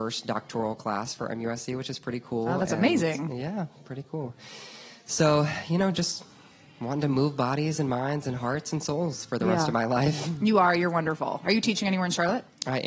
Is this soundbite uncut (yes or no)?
yes